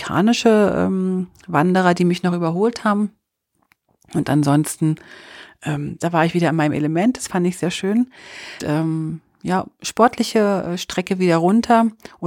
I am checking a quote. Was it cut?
yes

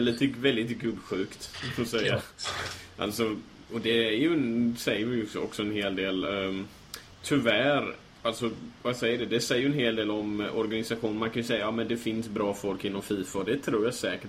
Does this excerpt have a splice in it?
no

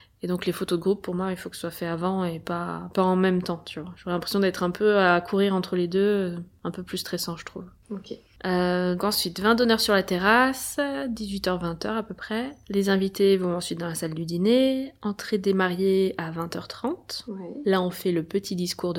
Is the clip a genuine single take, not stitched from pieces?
no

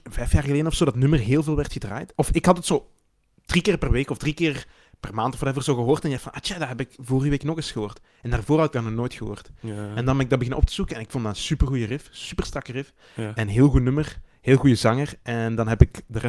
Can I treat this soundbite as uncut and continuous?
yes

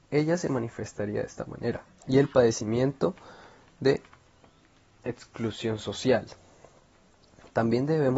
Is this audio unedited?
no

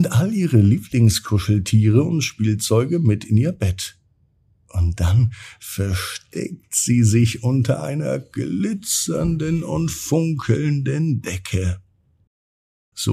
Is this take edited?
no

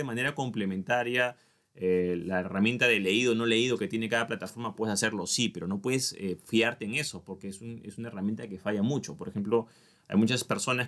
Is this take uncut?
yes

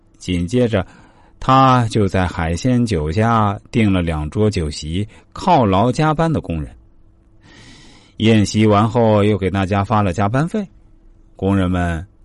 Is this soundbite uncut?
yes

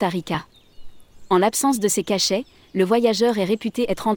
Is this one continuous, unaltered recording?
yes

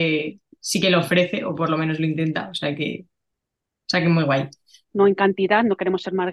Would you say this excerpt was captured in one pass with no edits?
no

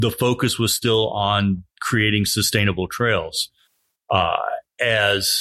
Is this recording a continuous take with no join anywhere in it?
yes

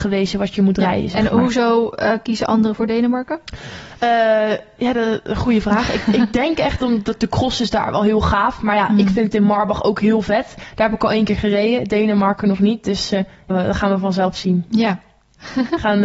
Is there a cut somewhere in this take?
yes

